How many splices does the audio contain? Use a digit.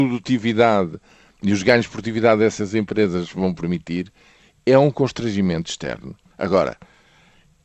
1